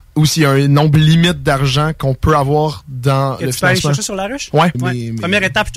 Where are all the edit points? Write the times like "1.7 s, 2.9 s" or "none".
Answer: 4.7 s

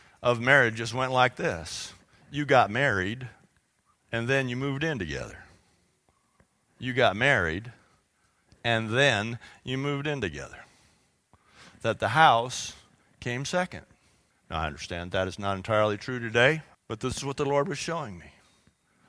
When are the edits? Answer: 14.3 s, 16.7 s

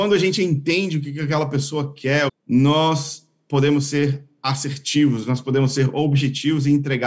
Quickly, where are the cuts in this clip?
2.3 s

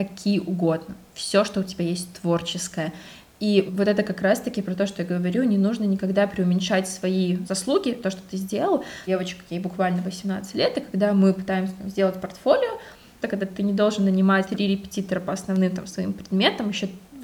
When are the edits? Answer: 13.2 s

